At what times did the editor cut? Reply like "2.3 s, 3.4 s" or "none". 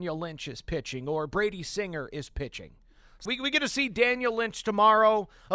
3.3 s